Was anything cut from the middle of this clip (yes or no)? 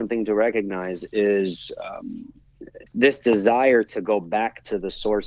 yes